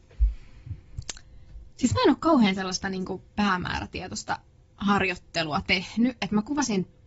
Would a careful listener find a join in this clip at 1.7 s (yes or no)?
no